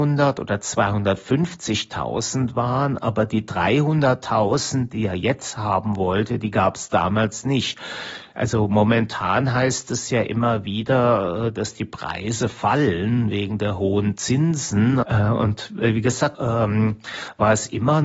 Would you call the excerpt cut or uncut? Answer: cut